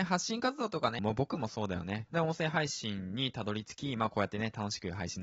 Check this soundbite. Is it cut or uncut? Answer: cut